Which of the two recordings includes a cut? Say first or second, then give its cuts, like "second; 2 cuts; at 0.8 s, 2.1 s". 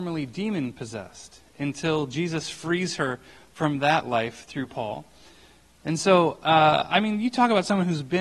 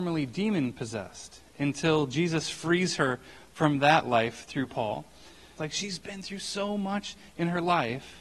second; 1 cut; at 5.6 s